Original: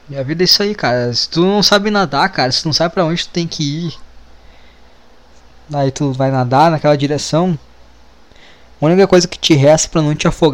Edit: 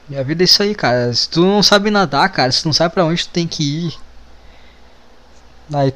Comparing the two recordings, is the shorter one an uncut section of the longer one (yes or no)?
yes